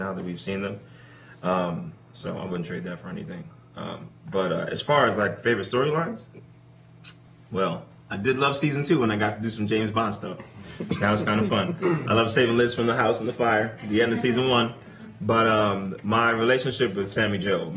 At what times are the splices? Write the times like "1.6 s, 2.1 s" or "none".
none